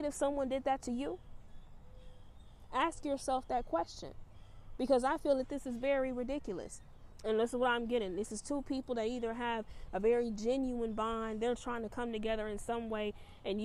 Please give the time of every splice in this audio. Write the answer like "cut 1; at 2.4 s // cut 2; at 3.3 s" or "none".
cut 1; at 7.2 s

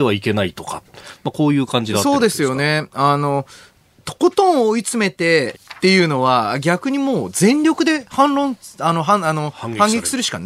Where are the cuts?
cut 1; at 5.5 s

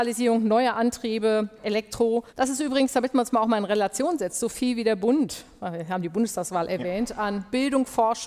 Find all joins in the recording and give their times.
cut 1; at 2.3 s

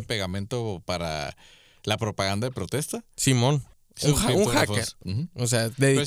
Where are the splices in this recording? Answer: cut 1; at 3.7 s // cut 2; at 5.0 s

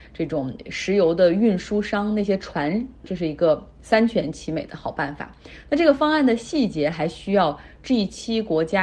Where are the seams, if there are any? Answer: cut 1; at 3.0 s

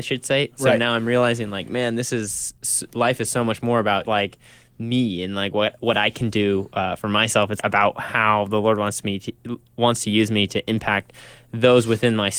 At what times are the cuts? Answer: cut 1; at 4.0 s // cut 2; at 7.6 s

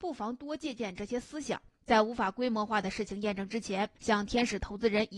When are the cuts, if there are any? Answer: cut 1; at 1.9 s // cut 2; at 4.0 s

